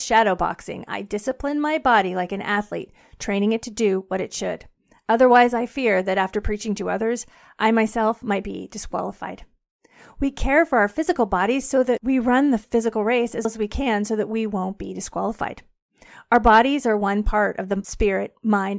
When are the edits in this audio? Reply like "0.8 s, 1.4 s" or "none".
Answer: 13.4 s